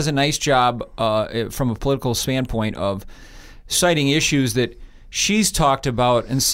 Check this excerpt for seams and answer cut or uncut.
uncut